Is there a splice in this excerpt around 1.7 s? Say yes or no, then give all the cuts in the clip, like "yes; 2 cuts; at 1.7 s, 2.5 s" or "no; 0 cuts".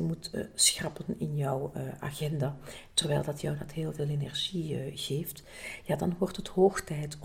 no; 0 cuts